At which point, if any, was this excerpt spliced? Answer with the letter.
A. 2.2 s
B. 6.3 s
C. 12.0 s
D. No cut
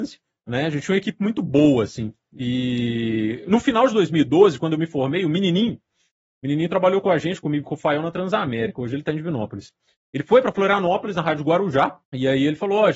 C